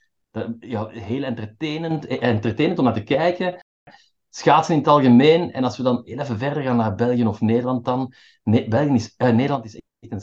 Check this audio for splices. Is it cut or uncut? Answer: uncut